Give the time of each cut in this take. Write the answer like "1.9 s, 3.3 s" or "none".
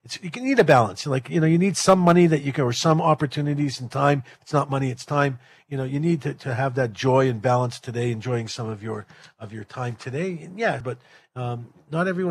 10.8 s

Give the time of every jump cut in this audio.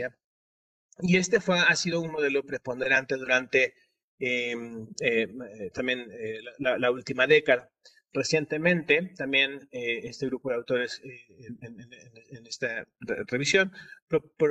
none

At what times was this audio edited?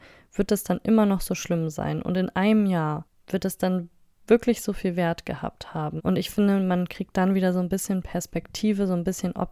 6.0 s

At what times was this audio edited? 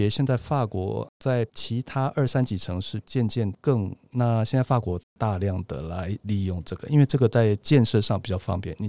4.0 s

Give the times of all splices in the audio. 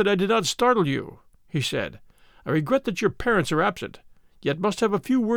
none

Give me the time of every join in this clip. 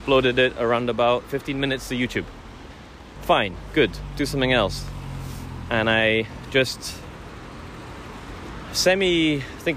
3.2 s

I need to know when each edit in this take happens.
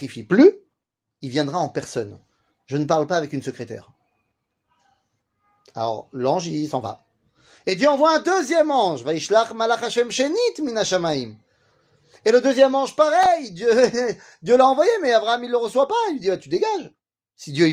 none

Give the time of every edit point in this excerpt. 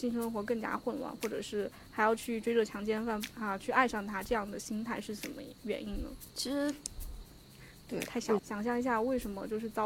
6.3 s, 8.4 s

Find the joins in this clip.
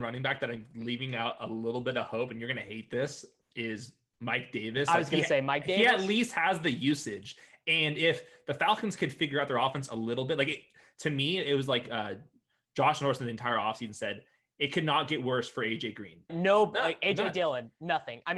16.3 s

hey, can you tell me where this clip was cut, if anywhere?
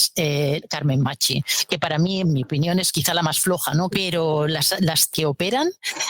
3.9 s, 5.1 s

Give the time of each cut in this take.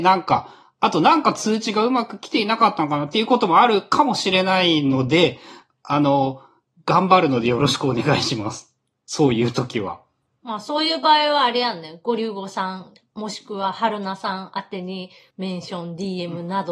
15.3 s

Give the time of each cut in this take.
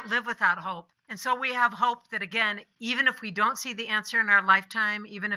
1.0 s

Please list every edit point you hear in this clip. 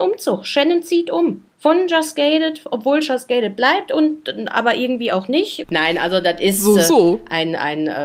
1.5 s, 5.6 s

